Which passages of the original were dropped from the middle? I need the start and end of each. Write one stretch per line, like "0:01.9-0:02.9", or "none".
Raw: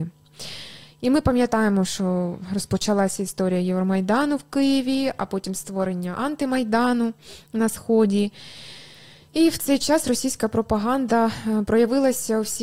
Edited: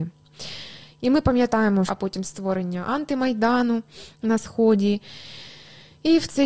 0:01.9-0:05.2